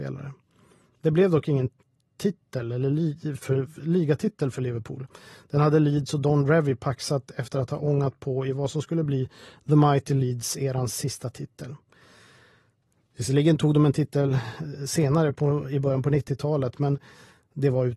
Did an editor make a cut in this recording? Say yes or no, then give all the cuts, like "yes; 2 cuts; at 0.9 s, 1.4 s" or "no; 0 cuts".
no; 0 cuts